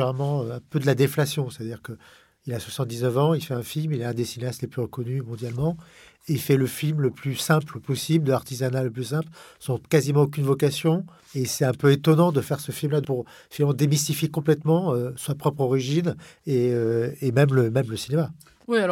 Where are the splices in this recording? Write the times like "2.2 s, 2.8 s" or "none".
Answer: none